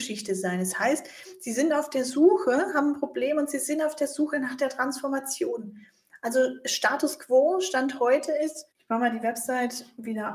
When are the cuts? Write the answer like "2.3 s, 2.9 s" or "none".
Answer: 8.7 s